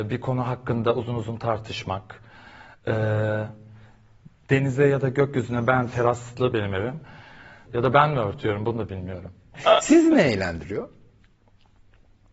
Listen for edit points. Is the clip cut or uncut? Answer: cut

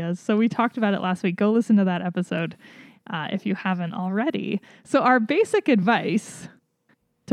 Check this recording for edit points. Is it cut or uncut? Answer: uncut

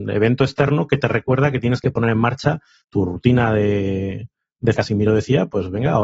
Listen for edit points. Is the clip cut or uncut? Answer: cut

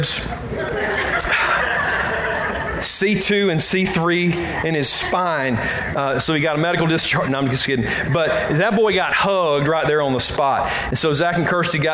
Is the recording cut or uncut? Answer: uncut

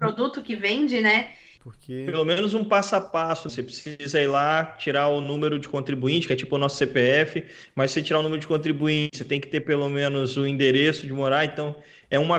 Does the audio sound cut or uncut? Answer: cut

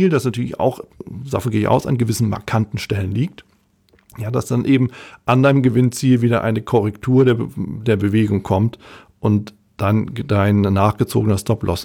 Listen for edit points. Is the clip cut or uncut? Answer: uncut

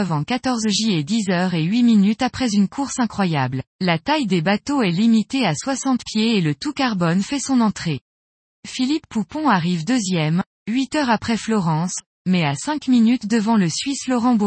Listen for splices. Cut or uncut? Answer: cut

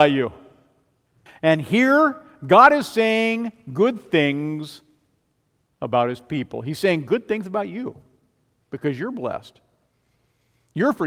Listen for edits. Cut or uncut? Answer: cut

